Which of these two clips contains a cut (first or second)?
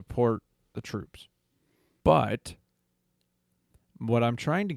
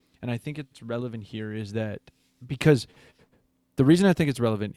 first